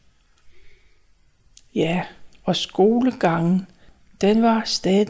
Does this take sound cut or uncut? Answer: uncut